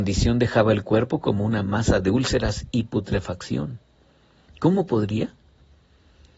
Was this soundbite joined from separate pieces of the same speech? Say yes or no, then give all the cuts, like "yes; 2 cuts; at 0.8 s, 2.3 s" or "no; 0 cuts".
yes; 1 cut; at 4.5 s